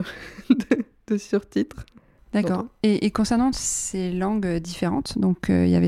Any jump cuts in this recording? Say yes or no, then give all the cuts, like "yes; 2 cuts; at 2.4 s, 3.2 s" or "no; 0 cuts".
yes; 1 cut; at 2.2 s